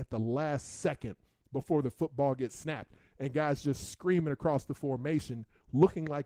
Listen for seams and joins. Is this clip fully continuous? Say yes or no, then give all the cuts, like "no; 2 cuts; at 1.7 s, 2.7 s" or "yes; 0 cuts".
yes; 0 cuts